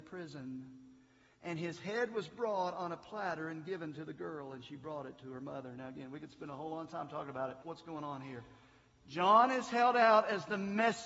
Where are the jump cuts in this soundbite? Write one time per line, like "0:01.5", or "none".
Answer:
0:07.6